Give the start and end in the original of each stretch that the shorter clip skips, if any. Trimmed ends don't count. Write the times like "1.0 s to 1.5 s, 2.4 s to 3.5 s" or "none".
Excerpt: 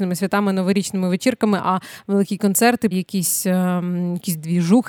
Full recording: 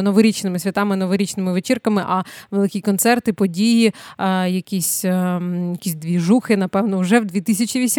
3.3 s to 4.5 s